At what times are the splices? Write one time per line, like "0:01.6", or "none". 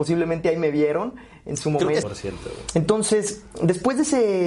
0:02.0